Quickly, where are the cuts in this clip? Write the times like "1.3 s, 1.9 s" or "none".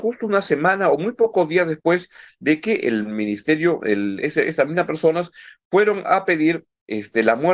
4.2 s